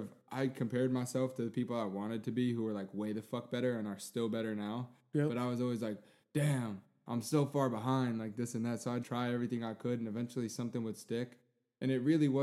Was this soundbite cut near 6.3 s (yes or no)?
no